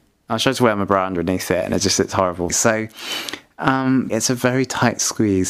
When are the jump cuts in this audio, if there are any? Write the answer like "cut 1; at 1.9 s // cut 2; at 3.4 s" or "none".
cut 1; at 2.5 s // cut 2; at 4.1 s

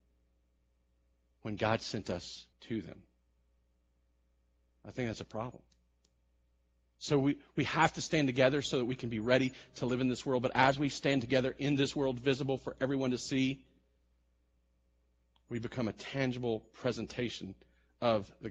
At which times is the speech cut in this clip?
cut 1; at 2.5 s

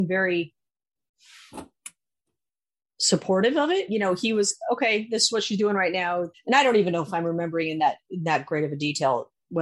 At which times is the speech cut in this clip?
cut 1; at 3.9 s // cut 2; at 6.3 s

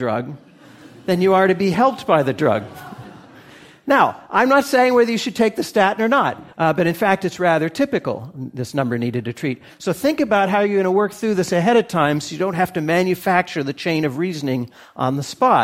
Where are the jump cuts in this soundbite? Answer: cut 1; at 6.5 s // cut 2; at 9.7 s

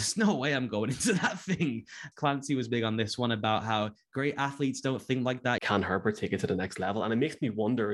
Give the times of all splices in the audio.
cut 1; at 2.1 s // cut 2; at 5.6 s

